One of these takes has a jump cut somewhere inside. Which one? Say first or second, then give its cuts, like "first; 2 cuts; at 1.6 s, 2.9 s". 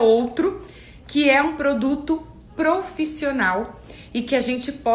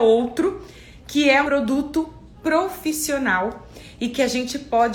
second; 1 cut; at 1.4 s